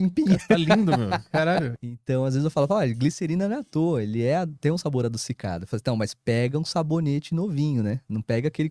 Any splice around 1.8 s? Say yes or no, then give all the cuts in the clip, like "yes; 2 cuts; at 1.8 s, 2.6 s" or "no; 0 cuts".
yes; 1 cut; at 1.8 s